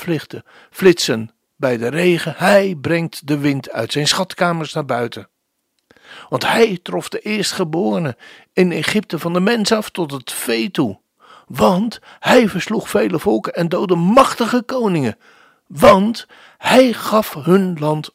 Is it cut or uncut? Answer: uncut